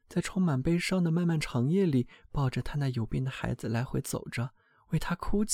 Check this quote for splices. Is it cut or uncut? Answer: uncut